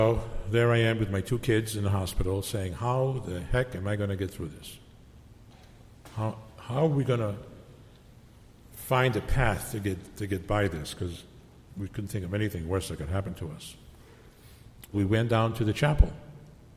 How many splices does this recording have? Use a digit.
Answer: 1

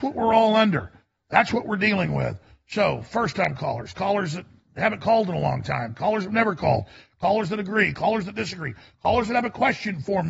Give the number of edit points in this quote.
1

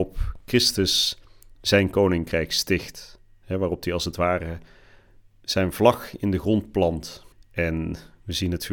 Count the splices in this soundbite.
1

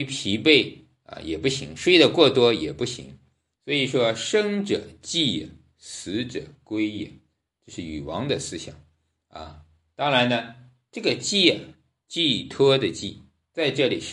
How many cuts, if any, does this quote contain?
1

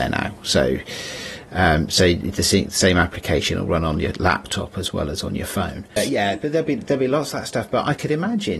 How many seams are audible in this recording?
1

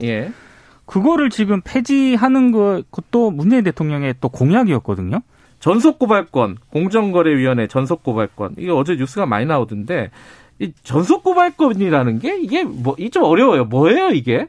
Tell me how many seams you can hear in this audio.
2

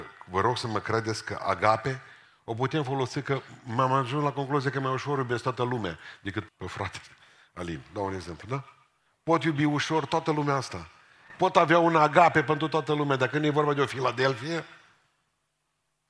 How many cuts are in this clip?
1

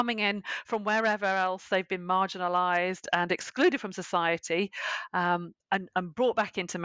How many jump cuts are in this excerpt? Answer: 0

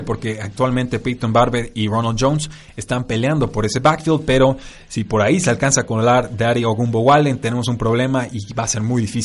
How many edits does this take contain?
0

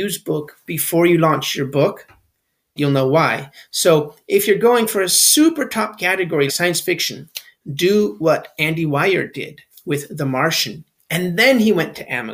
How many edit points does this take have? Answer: 3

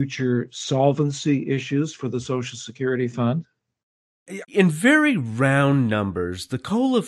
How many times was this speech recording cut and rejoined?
1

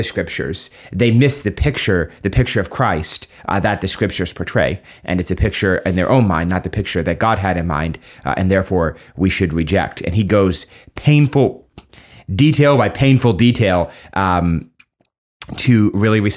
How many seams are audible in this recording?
1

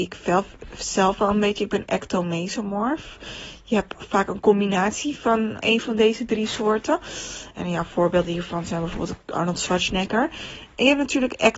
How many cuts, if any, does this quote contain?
2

